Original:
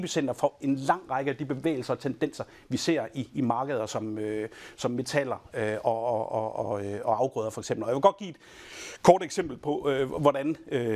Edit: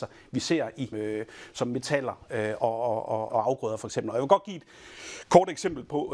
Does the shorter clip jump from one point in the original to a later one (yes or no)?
yes